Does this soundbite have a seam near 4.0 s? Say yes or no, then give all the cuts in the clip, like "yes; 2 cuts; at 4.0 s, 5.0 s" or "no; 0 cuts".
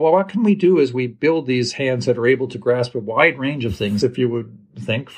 yes; 1 cut; at 4.0 s